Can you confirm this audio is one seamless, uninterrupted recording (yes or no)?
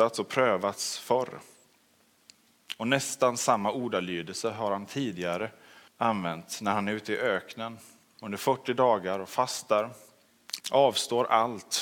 no